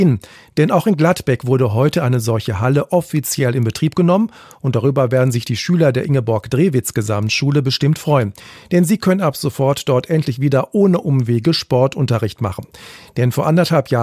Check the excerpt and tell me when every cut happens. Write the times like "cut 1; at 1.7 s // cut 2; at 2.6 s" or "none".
none